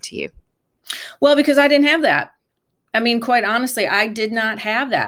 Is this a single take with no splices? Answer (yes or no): yes